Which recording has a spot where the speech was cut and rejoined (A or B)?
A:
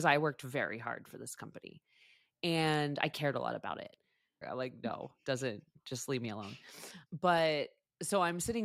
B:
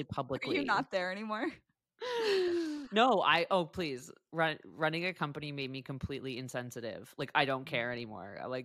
A